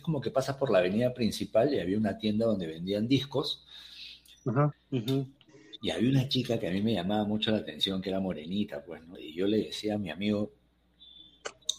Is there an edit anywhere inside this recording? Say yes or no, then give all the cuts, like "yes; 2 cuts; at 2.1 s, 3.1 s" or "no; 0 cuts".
yes; 2 cuts; at 4.7 s, 9.1 s